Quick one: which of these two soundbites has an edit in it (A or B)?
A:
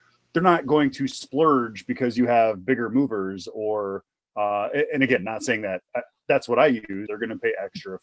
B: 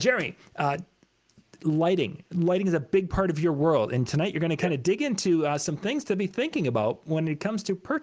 A